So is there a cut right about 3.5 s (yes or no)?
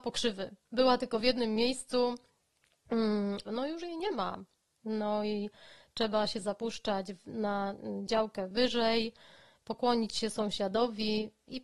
yes